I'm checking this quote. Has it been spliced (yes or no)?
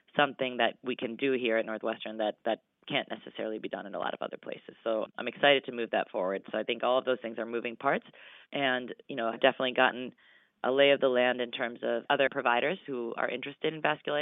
yes